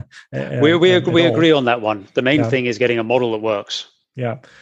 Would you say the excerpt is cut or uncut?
uncut